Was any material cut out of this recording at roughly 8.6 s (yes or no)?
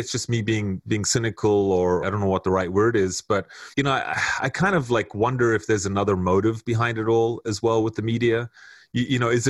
no